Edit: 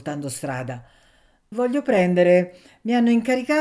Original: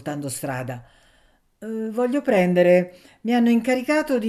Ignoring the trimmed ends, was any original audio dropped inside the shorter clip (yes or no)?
yes